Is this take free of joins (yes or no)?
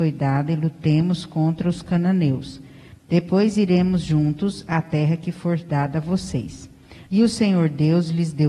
no